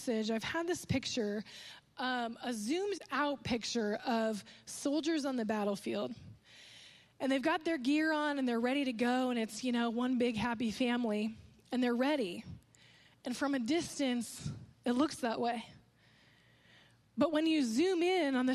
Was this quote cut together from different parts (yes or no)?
no